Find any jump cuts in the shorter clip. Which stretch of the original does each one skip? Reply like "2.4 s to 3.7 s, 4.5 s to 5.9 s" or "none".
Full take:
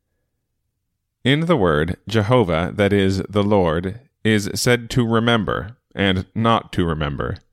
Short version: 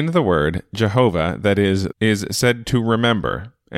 3.3 s to 4.2 s